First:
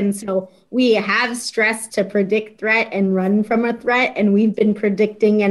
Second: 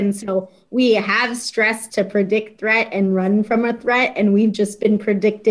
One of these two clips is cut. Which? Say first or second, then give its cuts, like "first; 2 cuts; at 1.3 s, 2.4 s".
first; 1 cut; at 4.5 s